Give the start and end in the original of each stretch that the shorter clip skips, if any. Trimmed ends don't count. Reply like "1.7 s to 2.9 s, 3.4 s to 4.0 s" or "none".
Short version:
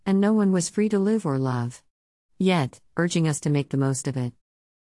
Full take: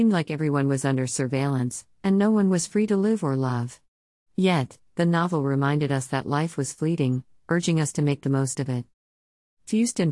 4.8 s to 7.4 s